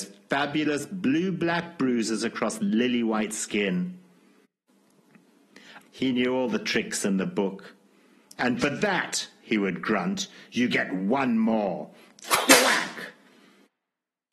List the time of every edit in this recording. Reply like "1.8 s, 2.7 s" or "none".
5.8 s